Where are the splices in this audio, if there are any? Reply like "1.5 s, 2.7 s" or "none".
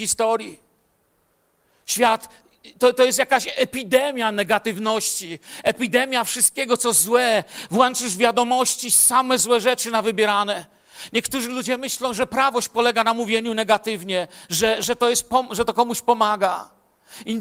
none